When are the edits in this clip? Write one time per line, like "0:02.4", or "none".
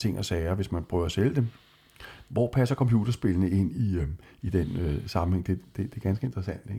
none